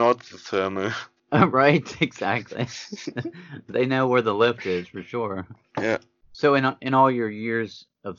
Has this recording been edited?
yes; 1 cut; at 1.2 s

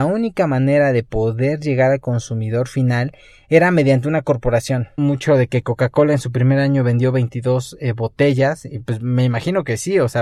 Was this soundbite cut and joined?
yes; 1 cut; at 5.0 s

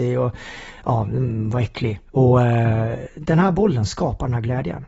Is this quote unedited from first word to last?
no; 1 cut; at 2.1 s

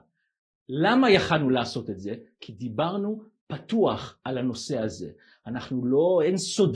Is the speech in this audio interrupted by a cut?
no; 0 cuts

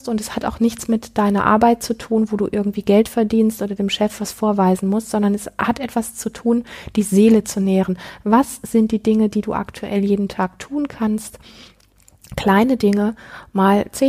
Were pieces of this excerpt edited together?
no; 0 cuts

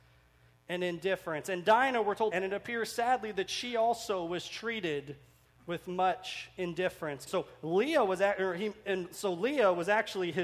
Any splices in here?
yes; 2 cuts; at 2.3 s, 7.3 s

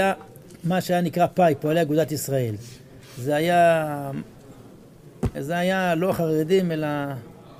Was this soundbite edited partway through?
yes; 1 cut; at 5.3 s

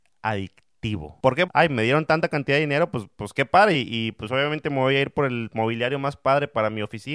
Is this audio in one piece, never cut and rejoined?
no; 2 cuts; at 1.5 s, 3.7 s

